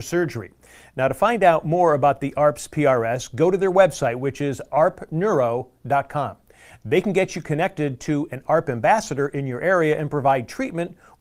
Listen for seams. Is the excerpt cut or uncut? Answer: uncut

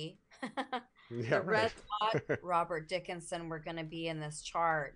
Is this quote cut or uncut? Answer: cut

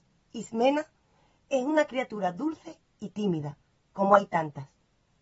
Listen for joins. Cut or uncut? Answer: uncut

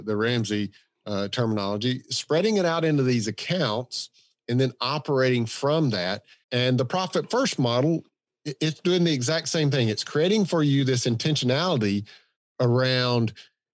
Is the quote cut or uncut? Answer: cut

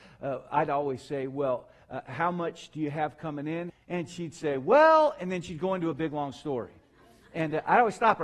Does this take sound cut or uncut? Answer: cut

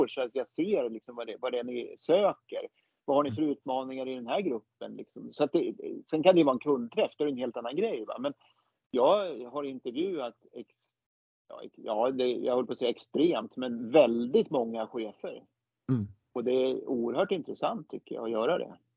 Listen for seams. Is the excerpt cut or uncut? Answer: uncut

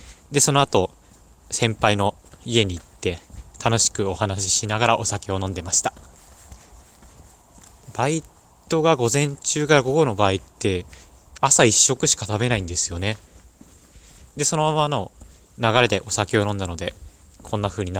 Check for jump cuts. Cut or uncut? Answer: uncut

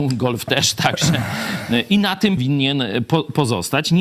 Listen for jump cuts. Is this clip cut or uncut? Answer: cut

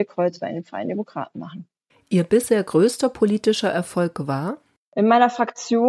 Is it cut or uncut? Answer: uncut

